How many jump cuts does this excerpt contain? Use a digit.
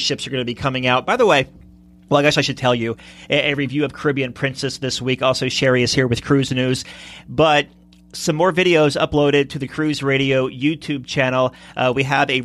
0